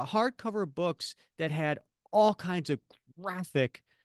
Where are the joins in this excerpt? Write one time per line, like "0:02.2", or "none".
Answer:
none